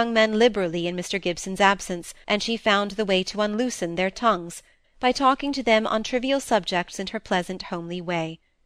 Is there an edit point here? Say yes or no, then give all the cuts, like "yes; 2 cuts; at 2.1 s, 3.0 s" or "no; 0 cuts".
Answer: yes; 2 cuts; at 2.2 s, 4.8 s